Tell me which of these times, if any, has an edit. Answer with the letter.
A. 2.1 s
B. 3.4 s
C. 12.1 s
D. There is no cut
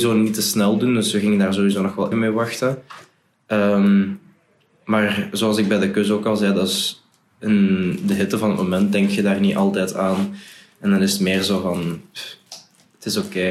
A